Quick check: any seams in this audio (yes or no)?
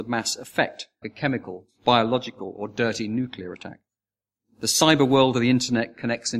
yes